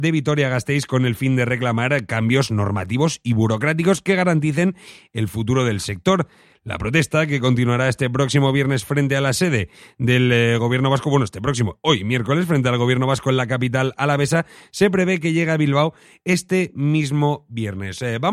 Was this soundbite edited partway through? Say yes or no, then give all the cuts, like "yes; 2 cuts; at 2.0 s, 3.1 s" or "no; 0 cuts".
no; 0 cuts